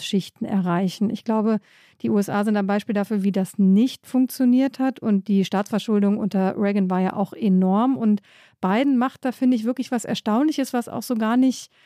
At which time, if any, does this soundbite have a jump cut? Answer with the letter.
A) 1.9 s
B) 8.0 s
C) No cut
C